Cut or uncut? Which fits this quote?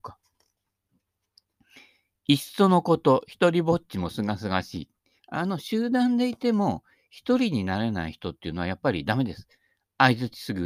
cut